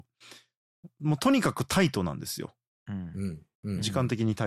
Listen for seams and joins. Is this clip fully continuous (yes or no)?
no